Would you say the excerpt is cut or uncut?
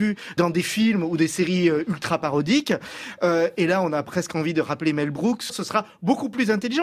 cut